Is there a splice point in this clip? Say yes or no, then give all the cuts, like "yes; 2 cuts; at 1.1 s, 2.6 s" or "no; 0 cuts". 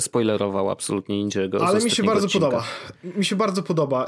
no; 0 cuts